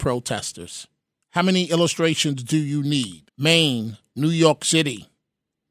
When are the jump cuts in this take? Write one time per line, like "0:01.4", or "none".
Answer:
0:01.2
0:03.3